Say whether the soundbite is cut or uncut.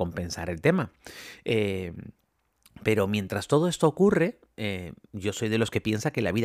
uncut